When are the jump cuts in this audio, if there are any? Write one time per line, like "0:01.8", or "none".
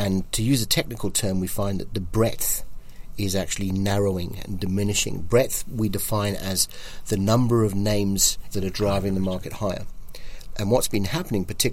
0:08.5